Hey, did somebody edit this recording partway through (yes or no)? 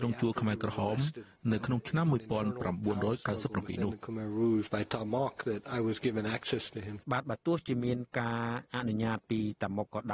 yes